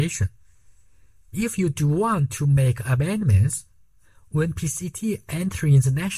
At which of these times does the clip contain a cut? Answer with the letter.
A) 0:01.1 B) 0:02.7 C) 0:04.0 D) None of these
D